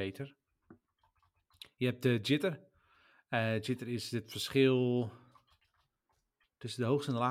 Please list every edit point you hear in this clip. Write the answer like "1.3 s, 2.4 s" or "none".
none